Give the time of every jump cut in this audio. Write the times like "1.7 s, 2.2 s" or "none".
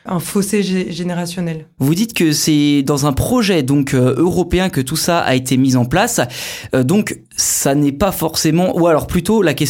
none